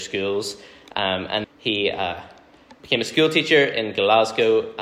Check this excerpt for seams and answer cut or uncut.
cut